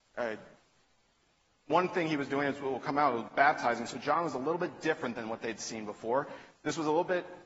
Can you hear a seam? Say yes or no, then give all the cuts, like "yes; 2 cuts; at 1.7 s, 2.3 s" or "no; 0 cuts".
no; 0 cuts